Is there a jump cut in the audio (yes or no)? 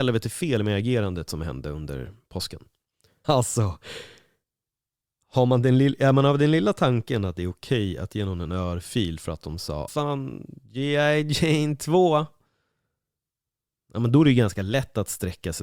yes